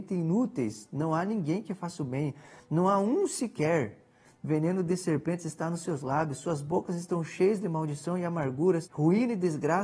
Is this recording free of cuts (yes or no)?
no